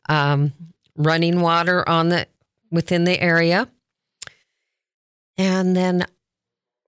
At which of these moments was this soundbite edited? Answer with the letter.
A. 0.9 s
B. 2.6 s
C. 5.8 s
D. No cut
B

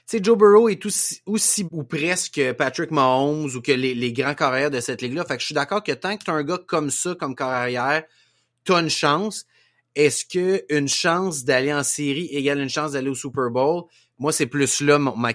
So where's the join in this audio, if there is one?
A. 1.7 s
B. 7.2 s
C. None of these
A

